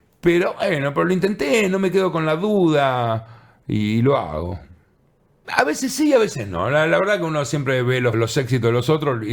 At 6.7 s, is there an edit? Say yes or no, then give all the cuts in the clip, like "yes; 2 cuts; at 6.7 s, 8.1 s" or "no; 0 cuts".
no; 2 cuts; at 5.4 s, 8.1 s